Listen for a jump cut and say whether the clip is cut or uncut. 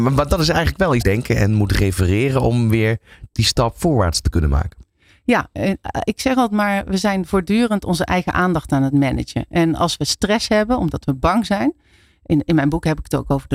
cut